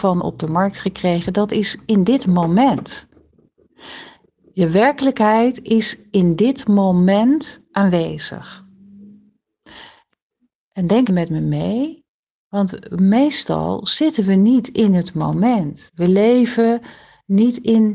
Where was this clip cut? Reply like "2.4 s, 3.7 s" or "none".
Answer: 11.1 s